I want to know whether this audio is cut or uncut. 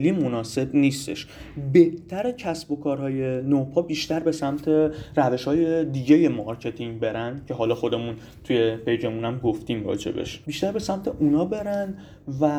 cut